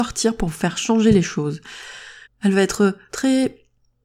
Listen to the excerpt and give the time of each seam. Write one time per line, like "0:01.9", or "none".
0:02.3